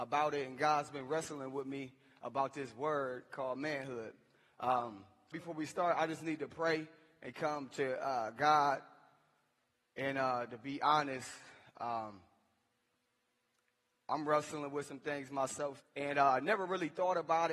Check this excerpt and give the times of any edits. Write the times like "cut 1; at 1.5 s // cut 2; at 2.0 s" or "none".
cut 1; at 5.3 s // cut 2; at 15.8 s